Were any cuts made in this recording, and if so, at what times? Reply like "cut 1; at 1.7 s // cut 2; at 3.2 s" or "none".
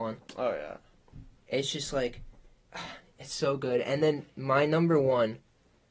cut 1; at 1.3 s